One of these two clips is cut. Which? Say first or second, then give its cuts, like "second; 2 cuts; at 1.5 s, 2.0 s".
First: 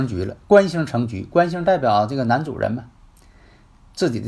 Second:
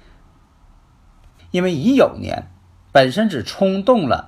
second; 1 cut; at 1.4 s